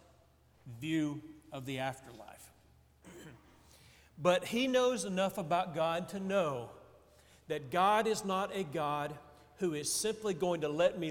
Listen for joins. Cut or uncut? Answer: uncut